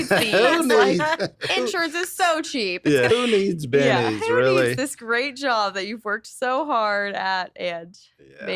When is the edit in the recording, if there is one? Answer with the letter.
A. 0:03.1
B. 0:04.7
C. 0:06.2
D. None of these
A